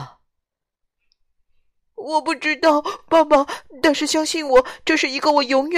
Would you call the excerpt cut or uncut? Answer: uncut